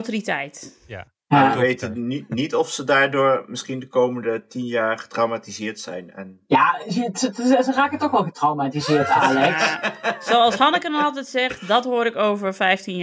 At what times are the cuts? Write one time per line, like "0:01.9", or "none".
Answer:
none